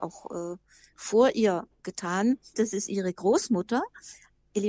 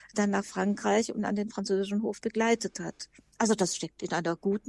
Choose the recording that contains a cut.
first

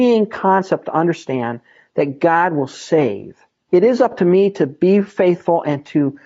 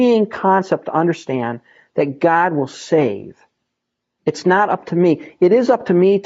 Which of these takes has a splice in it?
first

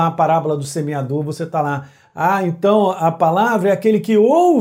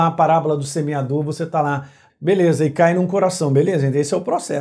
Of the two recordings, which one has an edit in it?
second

